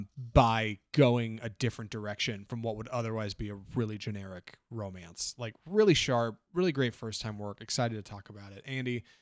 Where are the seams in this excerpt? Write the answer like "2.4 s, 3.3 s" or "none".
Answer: none